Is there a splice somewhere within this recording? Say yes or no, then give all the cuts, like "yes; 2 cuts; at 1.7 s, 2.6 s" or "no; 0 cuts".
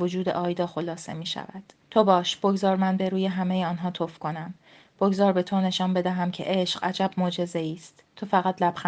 yes; 1 cut; at 1.8 s